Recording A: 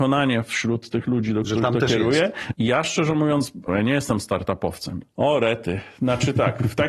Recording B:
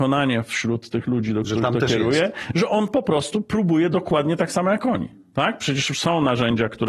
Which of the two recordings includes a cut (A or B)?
A